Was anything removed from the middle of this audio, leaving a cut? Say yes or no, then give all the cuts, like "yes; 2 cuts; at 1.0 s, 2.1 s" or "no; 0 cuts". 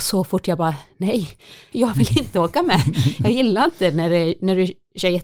yes; 1 cut; at 1.7 s